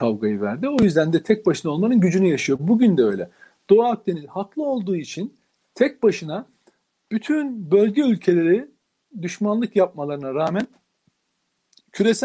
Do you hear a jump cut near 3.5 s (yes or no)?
no